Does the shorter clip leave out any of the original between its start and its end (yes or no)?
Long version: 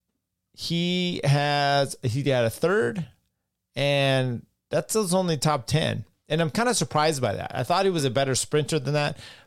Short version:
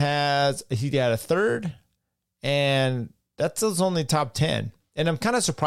no